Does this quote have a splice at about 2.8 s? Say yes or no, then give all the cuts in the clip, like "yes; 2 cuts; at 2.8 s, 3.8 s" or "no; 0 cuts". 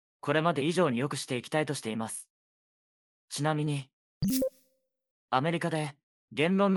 no; 1 cut; at 5.1 s